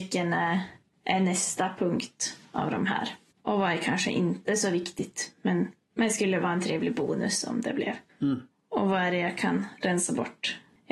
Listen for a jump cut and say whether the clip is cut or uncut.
uncut